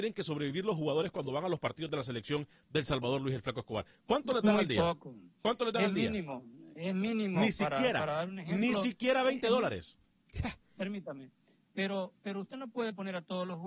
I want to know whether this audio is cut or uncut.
uncut